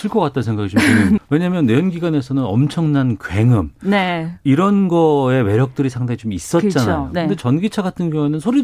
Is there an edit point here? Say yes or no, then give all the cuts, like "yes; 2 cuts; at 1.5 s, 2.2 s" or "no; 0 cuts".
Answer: yes; 1 cut; at 1.2 s